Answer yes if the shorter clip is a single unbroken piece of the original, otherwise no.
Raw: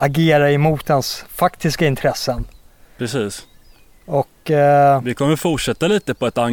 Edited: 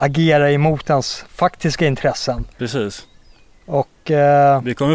no